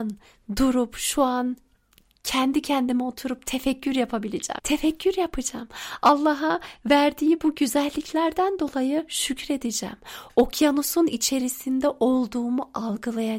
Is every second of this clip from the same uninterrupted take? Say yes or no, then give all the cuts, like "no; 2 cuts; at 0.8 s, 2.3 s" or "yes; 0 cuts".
no; 1 cut; at 4.6 s